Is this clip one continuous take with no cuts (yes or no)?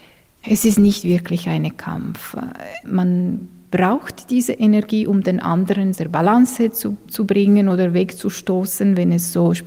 yes